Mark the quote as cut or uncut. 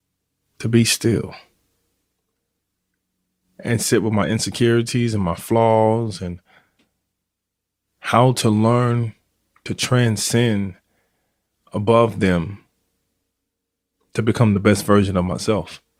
uncut